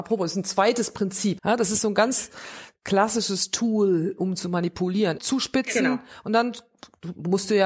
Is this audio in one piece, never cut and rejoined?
no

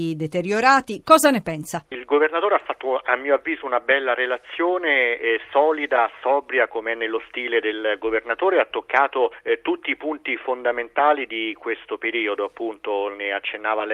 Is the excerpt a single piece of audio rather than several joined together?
yes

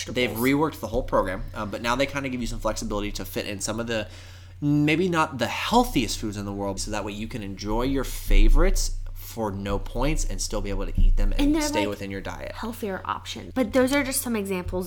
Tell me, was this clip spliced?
yes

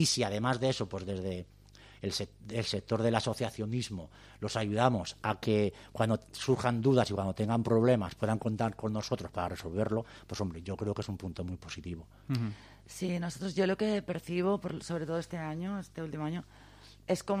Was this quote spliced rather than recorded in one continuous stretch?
no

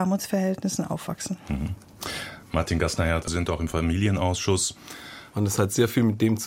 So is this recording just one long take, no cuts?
no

